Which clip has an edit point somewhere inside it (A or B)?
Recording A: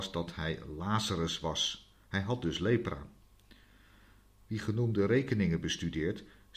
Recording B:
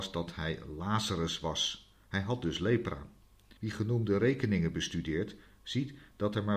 B